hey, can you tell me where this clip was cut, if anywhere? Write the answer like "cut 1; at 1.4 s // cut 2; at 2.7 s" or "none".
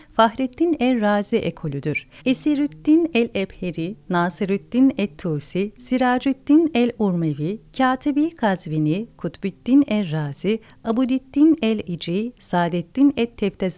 cut 1; at 2.2 s